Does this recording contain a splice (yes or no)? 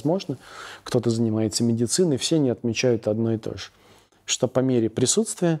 no